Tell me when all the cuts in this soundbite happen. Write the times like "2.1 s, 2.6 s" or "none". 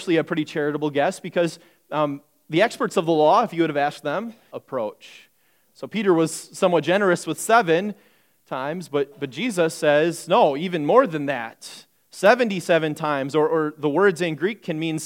4.5 s